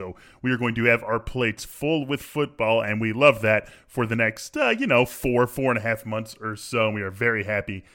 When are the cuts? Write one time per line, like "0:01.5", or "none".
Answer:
none

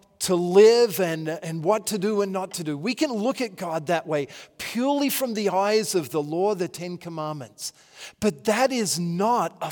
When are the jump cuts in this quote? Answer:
none

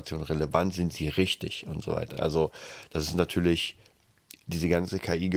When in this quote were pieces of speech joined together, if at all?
none

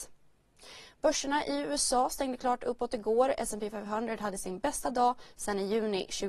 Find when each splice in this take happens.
none

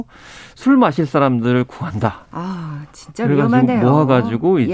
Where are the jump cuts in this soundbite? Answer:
none

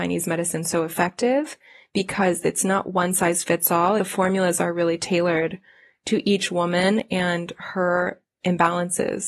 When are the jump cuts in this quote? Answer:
0:04.0

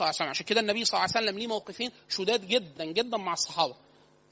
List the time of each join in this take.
0:02.8

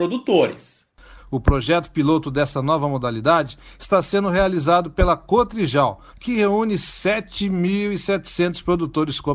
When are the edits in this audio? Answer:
0:01.2
0:06.1

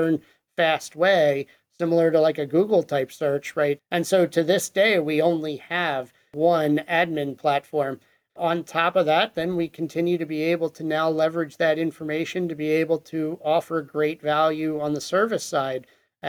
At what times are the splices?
0:03.8
0:08.3

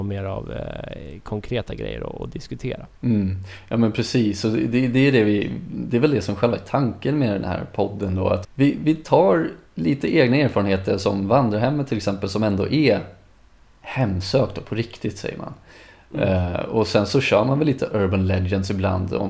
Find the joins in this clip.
0:08.4

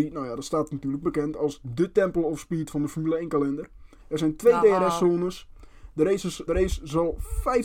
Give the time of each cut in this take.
0:04.0
0:06.5

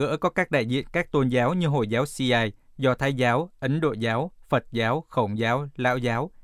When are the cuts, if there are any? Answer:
none

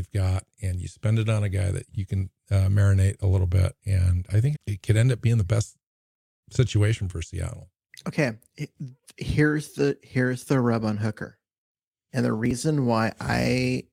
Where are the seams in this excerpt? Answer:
0:01.9
0:04.5

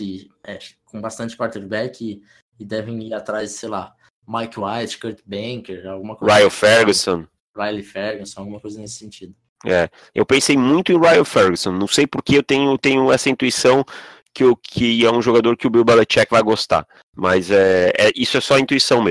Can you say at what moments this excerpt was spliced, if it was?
none

